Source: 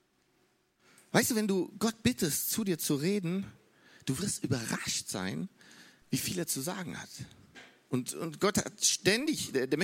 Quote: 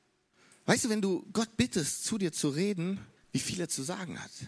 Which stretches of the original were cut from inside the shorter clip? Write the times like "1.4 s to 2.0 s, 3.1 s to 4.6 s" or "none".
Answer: 3.6 s to 5.9 s

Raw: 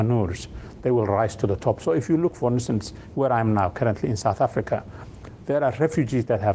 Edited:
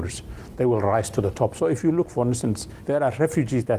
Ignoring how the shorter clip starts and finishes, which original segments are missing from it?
3.1 s to 5.5 s

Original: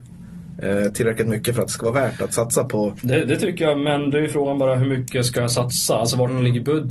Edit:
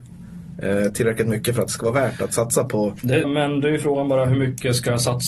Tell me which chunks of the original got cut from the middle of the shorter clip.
3.2 s to 3.7 s

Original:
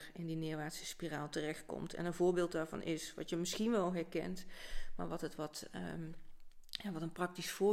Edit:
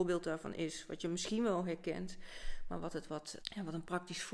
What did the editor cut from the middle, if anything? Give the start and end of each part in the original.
5.7 s to 6.7 s

